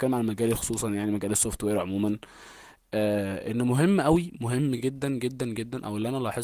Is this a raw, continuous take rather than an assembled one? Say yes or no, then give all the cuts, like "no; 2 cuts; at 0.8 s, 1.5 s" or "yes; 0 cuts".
yes; 0 cuts